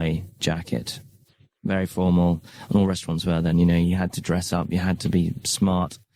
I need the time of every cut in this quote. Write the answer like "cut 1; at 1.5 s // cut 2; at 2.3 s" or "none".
none